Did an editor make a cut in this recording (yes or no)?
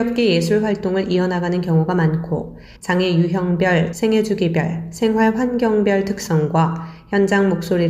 yes